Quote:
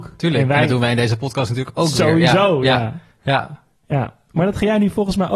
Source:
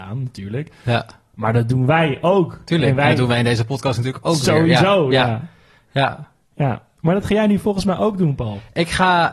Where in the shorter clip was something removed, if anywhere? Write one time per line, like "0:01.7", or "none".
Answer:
0:03.1